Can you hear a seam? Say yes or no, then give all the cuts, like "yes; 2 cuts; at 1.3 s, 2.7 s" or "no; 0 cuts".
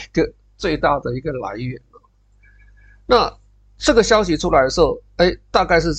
no; 0 cuts